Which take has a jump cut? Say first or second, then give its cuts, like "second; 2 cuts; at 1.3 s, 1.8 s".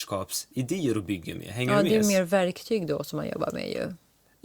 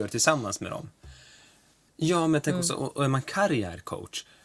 second; 1 cut; at 1.9 s